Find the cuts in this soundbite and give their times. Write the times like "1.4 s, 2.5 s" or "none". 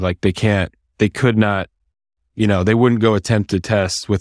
none